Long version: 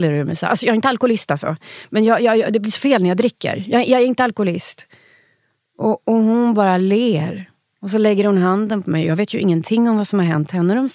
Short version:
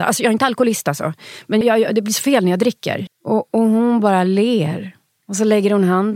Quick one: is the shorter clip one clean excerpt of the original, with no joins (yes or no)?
no